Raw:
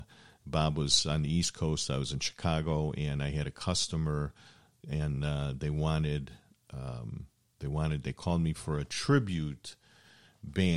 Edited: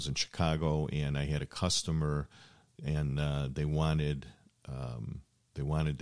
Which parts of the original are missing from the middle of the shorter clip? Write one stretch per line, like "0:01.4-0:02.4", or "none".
none